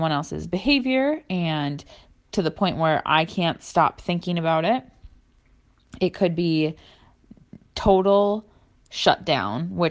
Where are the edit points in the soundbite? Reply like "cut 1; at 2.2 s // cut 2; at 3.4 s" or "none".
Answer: none